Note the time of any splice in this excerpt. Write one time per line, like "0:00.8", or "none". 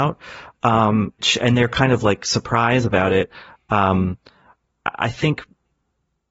0:01.2

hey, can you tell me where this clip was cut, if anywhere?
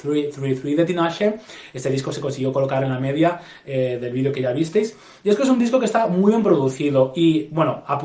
none

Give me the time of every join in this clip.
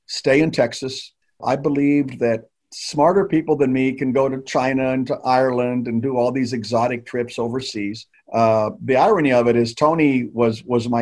0:01.4
0:08.1

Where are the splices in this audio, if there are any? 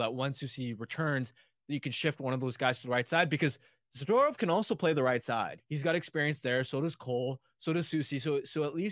0:05.6

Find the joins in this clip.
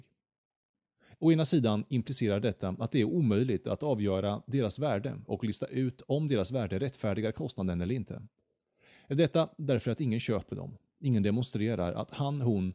none

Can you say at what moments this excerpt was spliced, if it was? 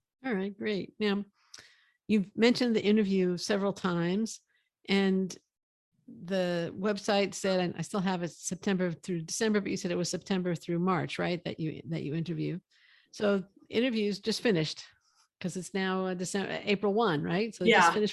none

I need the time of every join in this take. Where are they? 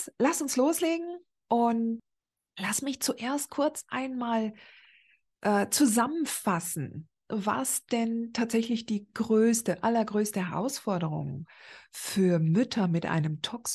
0:01.4

